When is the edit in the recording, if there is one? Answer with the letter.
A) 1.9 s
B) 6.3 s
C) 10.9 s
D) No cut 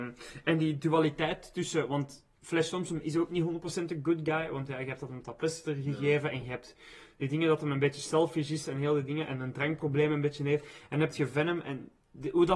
D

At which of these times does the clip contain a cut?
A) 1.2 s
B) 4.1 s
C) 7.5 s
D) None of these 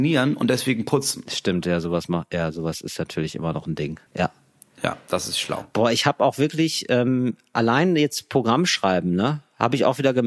B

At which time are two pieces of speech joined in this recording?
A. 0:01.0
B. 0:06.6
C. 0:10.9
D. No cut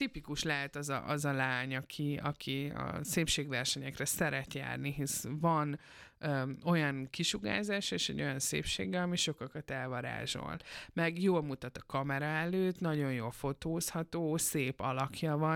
D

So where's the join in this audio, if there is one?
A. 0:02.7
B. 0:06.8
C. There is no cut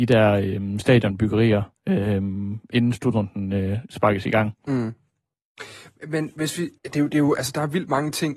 B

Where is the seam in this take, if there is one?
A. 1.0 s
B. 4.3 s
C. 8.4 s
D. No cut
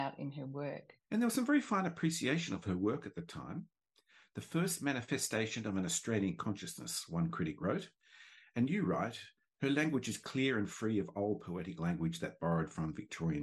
A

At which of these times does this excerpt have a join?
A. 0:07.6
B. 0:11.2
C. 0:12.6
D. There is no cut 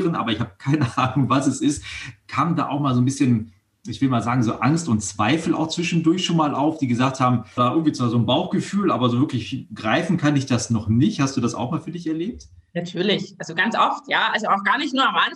A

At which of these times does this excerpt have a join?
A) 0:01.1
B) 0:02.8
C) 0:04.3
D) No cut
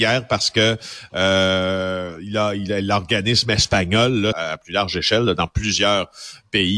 C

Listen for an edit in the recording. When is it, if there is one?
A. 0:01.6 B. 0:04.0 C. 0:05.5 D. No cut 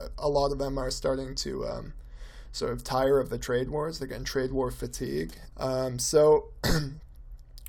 C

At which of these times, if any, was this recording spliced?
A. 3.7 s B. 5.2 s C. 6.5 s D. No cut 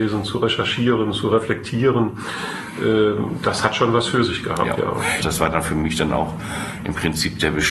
B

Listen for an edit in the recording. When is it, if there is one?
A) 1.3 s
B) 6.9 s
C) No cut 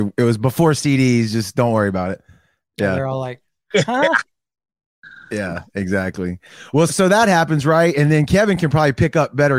B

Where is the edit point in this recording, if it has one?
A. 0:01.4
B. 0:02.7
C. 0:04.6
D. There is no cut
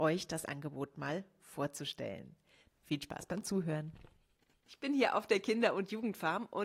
B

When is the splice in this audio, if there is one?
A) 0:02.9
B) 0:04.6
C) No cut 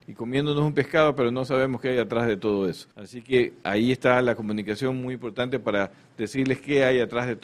A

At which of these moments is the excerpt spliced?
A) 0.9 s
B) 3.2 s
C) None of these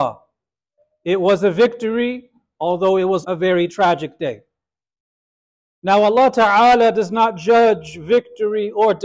B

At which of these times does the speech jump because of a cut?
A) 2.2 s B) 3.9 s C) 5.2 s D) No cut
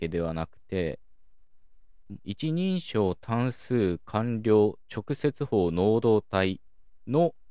A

